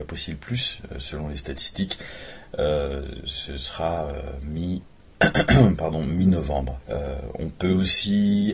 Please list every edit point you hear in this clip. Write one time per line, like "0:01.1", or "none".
0:06.8